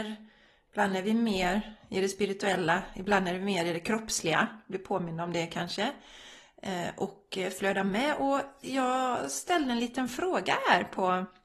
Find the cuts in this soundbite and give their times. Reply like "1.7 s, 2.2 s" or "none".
none

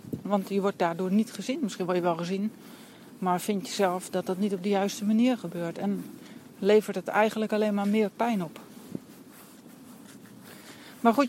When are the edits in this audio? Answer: none

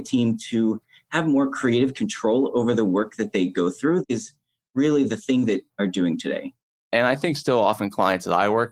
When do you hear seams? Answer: 5.7 s

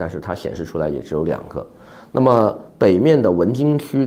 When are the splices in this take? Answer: none

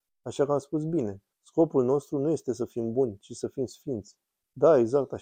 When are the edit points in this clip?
1.3 s

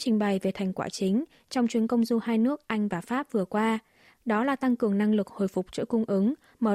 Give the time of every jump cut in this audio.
none

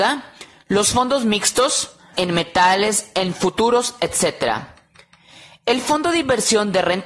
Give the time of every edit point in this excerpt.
2.1 s

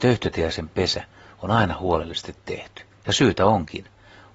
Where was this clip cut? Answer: 2.9 s

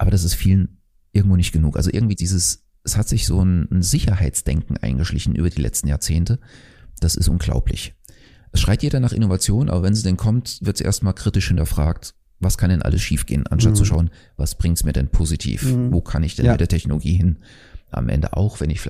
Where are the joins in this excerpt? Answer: 2.2 s

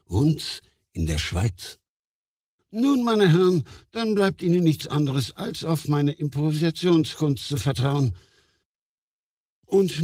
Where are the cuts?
2.6 s

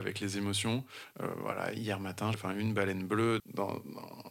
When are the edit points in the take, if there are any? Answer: 1.1 s, 2.3 s, 3.4 s

